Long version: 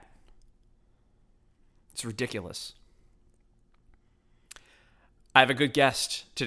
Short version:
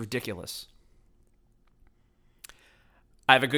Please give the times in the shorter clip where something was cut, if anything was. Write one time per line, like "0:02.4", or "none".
none